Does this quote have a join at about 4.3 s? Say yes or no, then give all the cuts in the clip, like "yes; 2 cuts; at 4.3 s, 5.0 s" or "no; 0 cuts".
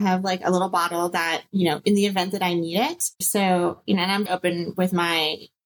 yes; 2 cuts; at 3.2 s, 4.3 s